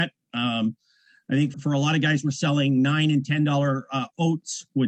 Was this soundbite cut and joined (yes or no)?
yes